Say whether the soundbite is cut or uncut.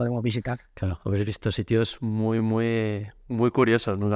uncut